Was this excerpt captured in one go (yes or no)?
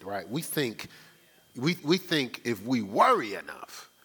no